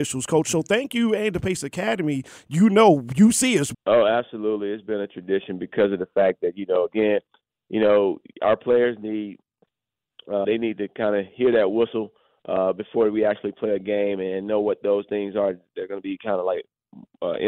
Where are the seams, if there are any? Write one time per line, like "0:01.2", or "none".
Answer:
0:03.7
0:10.4